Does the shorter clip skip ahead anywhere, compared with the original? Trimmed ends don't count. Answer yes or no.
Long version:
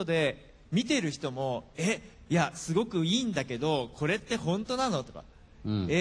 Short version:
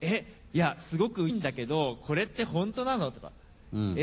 yes